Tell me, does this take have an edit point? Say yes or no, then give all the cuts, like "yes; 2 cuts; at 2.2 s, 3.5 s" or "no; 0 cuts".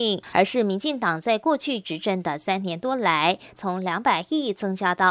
yes; 1 cut; at 3.5 s